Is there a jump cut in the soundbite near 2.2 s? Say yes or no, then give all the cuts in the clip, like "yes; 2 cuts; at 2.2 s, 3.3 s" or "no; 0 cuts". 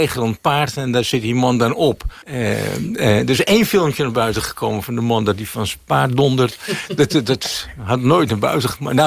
yes; 1 cut; at 2.2 s